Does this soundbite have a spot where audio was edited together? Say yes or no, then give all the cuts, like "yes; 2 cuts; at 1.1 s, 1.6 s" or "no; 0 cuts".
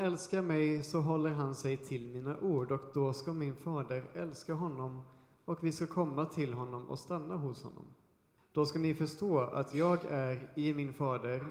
yes; 1 cut; at 8.4 s